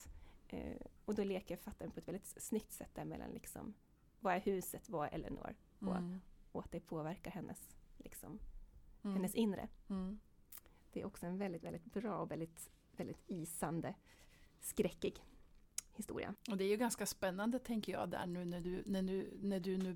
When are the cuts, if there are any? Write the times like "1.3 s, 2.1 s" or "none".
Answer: 4.2 s